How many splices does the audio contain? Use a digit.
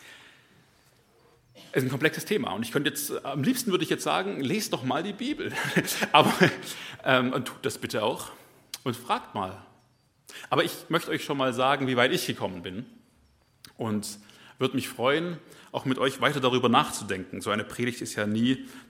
0